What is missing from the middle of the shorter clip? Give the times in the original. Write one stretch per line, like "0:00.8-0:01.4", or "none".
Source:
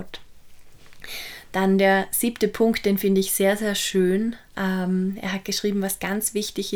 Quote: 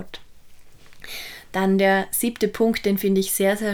none